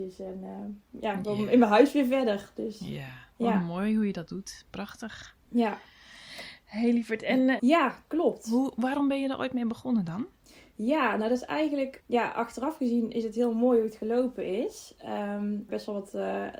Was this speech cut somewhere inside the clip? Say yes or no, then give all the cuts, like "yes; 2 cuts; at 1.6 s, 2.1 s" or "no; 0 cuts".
yes; 3 cuts; at 7.6 s, 12.0 s, 15.7 s